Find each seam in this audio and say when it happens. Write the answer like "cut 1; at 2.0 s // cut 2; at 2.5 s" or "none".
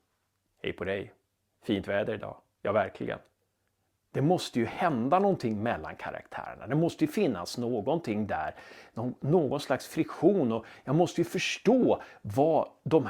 cut 1; at 4.0 s